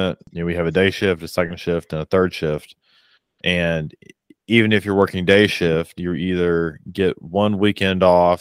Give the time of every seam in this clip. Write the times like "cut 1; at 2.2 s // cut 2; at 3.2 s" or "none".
cut 1; at 6.0 s